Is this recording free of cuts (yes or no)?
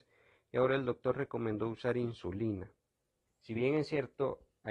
no